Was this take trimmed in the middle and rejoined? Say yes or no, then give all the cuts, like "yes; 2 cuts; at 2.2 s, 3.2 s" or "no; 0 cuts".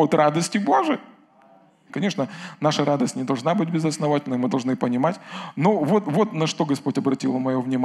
yes; 1 cut; at 1.9 s